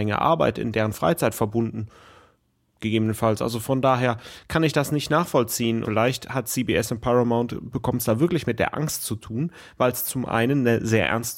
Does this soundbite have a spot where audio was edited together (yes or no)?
yes